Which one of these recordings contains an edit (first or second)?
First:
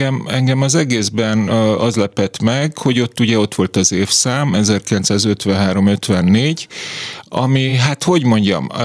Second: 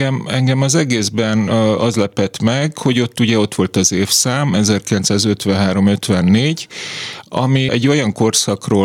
second